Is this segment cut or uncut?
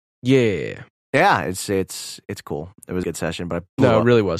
cut